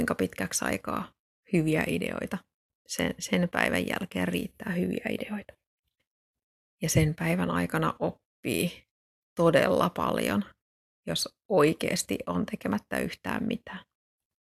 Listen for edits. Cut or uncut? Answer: uncut